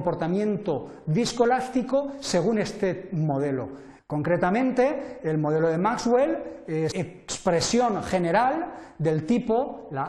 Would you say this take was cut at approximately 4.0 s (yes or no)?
yes